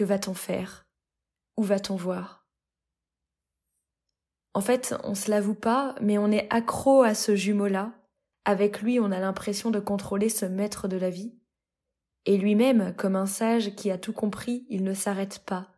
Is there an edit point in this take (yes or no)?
no